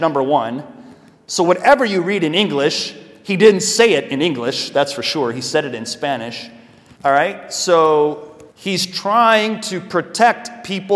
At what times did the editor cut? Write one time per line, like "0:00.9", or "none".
0:06.9
0:08.5